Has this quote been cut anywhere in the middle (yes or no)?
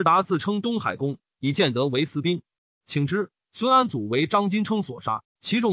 no